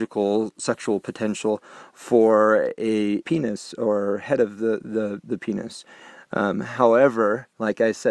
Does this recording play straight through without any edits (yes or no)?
no